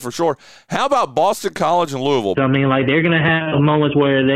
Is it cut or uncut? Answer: cut